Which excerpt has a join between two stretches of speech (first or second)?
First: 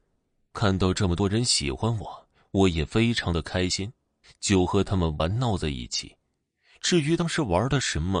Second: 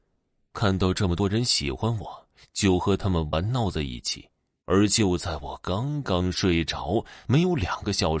second